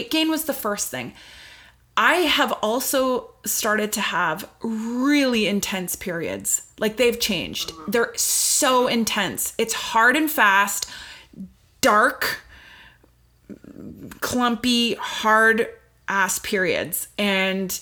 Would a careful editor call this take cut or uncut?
uncut